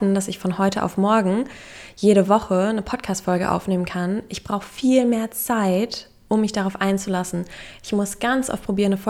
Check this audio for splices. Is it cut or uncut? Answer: uncut